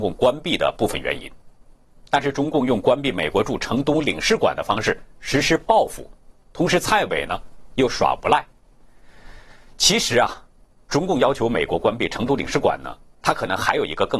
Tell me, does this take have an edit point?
no; 0 cuts

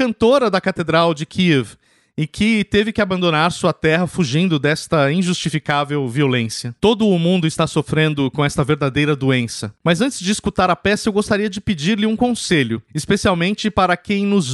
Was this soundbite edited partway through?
no; 0 cuts

